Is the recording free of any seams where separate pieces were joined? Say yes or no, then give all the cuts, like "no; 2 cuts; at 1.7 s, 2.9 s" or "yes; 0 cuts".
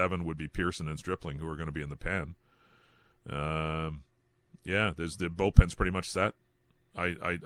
yes; 0 cuts